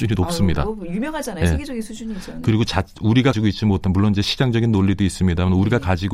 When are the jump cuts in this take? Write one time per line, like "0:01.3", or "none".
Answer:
0:03.3